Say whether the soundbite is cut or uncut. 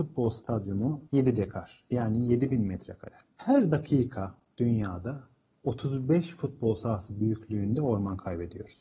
cut